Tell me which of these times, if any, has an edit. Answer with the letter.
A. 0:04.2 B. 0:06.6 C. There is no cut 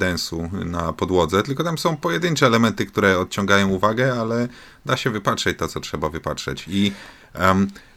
C